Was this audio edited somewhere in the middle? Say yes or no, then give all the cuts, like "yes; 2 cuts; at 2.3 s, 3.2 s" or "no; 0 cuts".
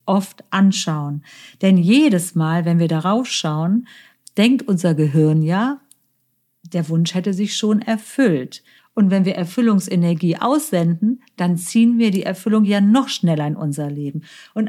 yes; 1 cut; at 8.8 s